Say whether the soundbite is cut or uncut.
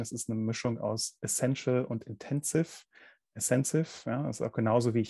uncut